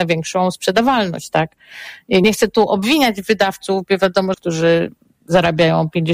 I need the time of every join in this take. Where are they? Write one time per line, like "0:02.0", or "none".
0:02.2
0:04.3